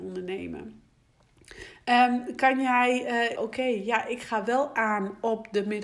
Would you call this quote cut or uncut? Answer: cut